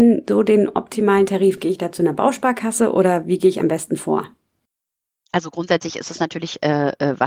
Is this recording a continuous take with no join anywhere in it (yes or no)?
yes